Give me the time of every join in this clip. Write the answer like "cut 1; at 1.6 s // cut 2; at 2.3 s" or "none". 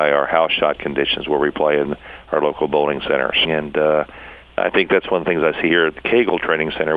cut 1; at 3.4 s

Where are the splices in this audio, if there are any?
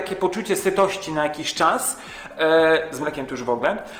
none

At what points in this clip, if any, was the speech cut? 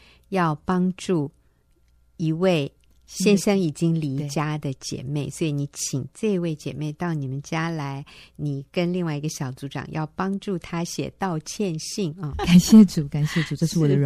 cut 1; at 12.3 s

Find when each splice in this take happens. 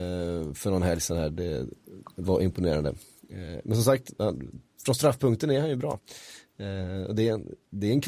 none

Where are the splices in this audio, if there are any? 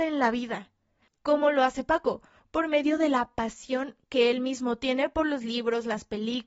none

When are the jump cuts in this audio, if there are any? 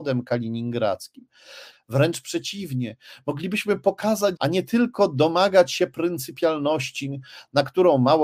cut 1; at 1.7 s // cut 2; at 4.4 s

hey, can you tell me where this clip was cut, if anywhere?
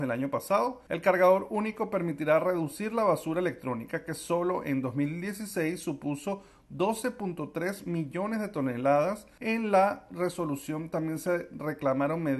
none

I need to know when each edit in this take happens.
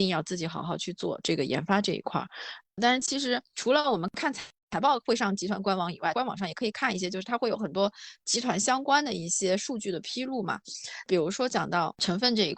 cut 1; at 2.8 s

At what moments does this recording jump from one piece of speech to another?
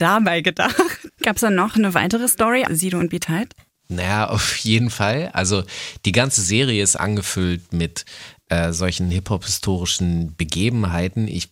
cut 1; at 1.1 s // cut 2; at 2.7 s // cut 3; at 7.0 s

